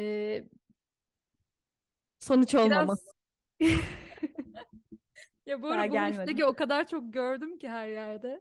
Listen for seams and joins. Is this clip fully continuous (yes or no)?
no